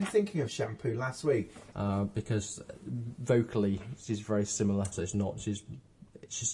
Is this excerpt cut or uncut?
cut